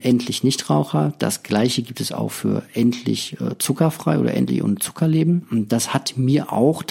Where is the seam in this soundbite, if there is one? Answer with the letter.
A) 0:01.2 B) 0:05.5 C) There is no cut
C